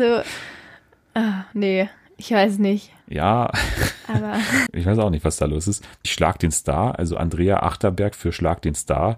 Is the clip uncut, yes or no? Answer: no